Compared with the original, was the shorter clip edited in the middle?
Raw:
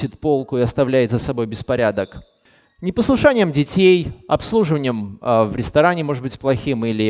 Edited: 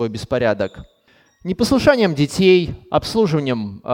no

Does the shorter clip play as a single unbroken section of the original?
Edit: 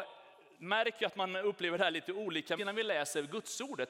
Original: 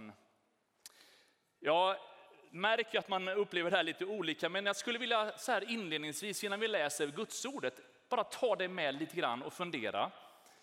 no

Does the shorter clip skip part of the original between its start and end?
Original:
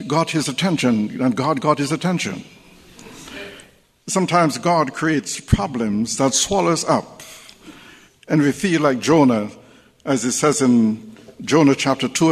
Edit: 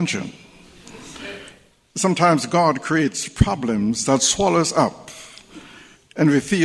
no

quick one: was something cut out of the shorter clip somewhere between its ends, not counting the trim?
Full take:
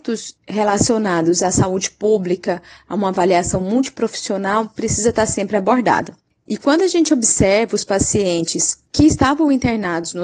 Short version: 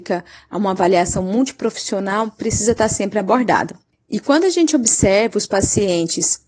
no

